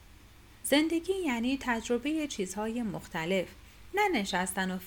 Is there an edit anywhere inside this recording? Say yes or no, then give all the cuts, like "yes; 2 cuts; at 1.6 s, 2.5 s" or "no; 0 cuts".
no; 0 cuts